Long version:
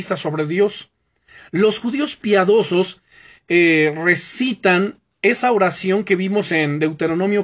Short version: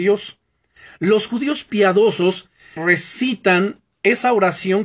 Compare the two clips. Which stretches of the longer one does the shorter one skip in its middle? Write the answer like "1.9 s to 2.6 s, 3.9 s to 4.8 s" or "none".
3.3 s to 4.0 s